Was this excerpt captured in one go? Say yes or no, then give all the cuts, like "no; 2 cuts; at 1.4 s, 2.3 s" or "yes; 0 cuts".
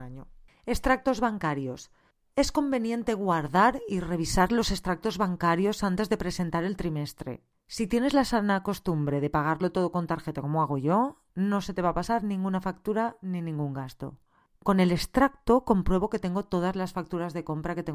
yes; 0 cuts